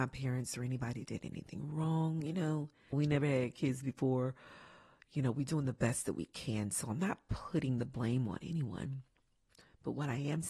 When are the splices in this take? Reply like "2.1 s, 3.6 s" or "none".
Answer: 2.9 s